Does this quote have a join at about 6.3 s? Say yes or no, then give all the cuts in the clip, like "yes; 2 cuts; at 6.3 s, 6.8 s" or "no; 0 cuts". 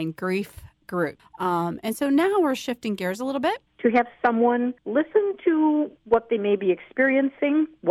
no; 3 cuts; at 1.2 s, 3.7 s, 4.8 s